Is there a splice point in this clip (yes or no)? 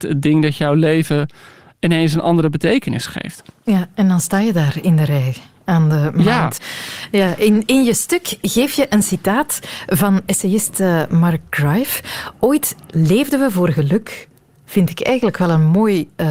yes